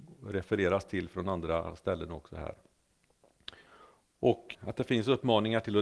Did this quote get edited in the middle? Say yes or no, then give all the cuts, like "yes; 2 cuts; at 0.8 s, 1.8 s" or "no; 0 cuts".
yes; 1 cut; at 4.5 s